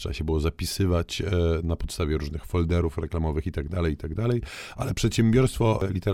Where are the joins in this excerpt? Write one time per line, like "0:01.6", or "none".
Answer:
none